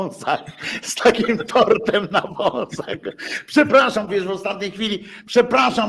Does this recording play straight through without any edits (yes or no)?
no